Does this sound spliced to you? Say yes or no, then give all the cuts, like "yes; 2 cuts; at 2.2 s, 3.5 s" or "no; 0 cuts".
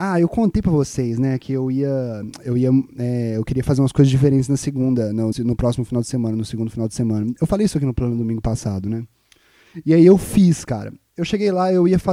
yes; 1 cut; at 5.3 s